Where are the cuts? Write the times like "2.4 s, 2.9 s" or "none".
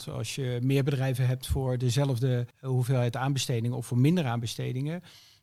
2.5 s

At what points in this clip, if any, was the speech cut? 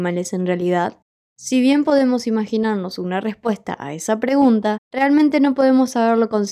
none

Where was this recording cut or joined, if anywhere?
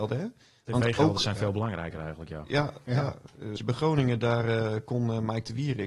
3.6 s

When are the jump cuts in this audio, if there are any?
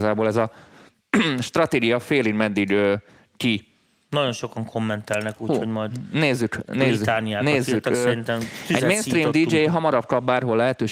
none

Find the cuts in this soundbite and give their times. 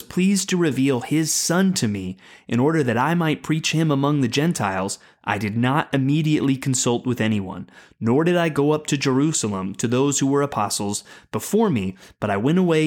none

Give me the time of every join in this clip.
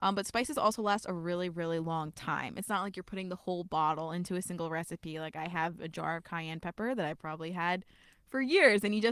none

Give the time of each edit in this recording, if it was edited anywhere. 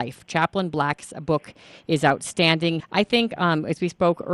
2.8 s

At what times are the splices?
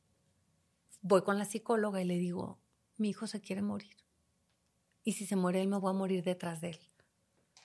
none

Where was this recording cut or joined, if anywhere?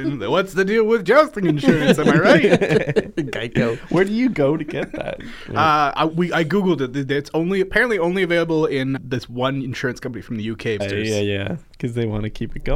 9.0 s, 10.8 s

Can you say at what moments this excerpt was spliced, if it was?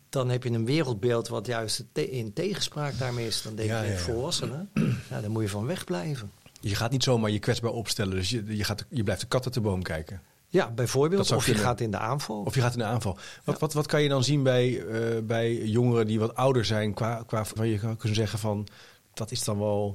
17.6 s

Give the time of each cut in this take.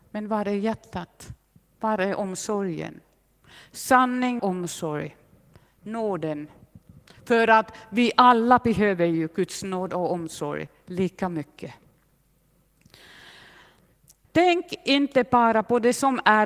4.4 s, 14.2 s

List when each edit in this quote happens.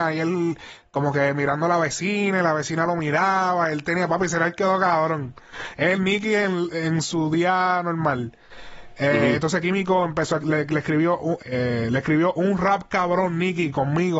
11.4 s

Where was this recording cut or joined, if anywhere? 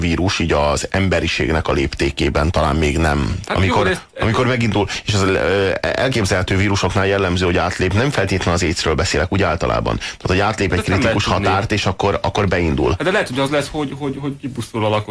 3.4 s

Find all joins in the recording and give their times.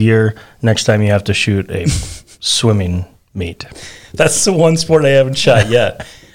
none

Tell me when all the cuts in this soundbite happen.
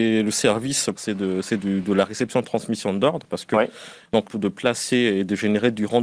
1.0 s, 4.2 s

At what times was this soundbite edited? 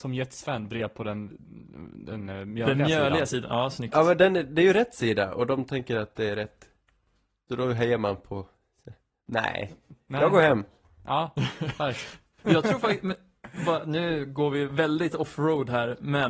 none

